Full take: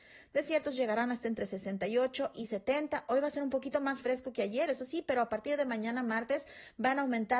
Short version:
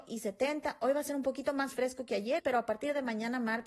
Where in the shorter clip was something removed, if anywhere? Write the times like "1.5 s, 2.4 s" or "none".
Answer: 2.4 s